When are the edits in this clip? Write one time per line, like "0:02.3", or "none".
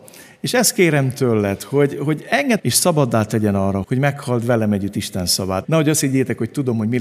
0:02.6
0:03.8
0:05.6